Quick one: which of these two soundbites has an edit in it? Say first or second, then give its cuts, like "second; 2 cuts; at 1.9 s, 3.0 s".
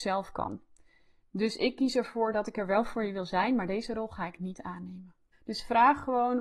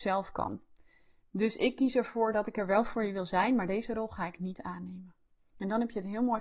first; 1 cut; at 5.3 s